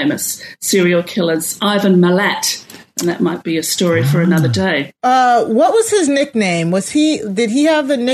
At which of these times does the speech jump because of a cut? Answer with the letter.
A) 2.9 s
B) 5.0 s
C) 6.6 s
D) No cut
B